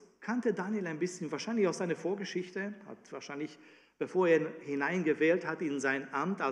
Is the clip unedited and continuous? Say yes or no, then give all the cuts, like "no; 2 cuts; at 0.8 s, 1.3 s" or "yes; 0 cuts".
yes; 0 cuts